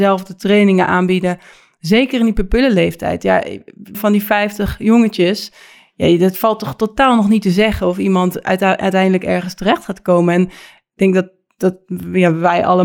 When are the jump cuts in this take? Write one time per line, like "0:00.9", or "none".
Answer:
0:03.9